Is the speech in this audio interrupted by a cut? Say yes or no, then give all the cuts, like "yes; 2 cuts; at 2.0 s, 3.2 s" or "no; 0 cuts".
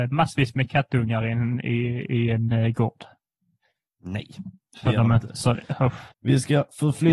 yes; 1 cut; at 6.1 s